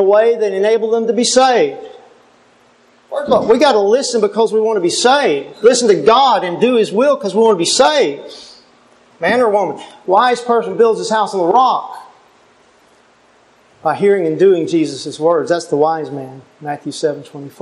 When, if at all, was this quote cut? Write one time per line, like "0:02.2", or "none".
0:09.1